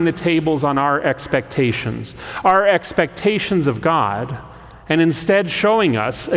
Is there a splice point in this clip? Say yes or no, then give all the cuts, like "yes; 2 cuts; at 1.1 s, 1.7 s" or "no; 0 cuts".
no; 0 cuts